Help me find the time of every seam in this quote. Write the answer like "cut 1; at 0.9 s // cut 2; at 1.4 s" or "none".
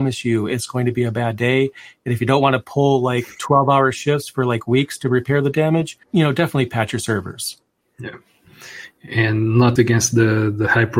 cut 1; at 6.0 s // cut 2; at 9.8 s